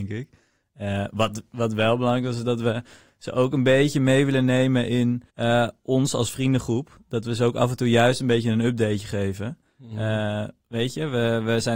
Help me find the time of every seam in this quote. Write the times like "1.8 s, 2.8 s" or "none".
5.3 s